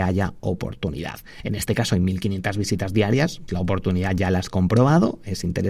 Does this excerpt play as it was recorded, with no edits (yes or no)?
no